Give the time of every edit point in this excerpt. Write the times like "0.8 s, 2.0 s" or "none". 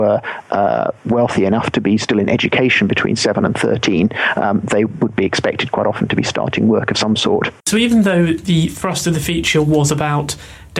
7.6 s

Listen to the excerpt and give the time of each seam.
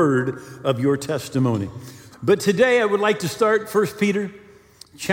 2.1 s

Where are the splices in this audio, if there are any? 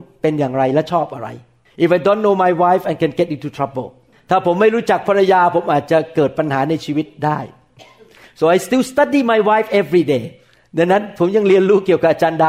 none

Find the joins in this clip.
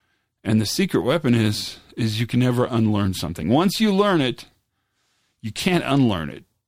none

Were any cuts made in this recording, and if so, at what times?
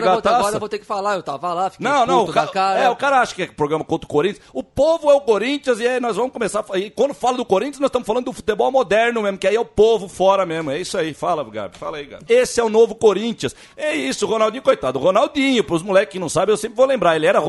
12.3 s, 13.6 s

